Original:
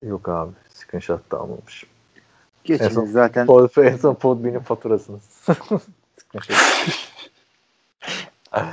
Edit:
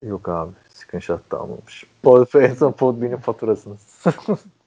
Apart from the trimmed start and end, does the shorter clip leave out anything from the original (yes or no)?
yes